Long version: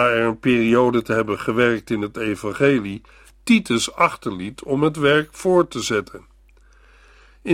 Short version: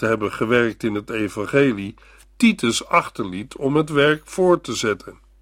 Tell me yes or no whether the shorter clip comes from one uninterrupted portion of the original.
yes